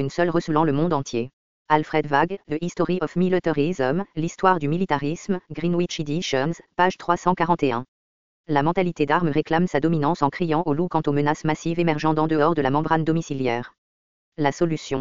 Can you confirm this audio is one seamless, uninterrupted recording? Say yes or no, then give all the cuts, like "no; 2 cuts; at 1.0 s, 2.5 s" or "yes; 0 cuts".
no; 1 cut; at 1.6 s